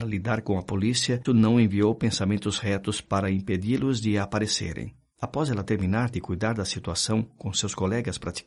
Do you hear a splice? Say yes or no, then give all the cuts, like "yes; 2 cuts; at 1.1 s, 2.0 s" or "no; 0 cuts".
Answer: yes; 2 cuts; at 1.2 s, 5.1 s